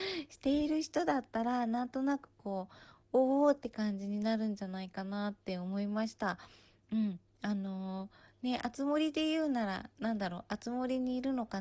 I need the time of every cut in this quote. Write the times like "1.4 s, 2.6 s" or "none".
none